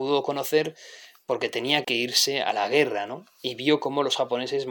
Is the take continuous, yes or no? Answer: no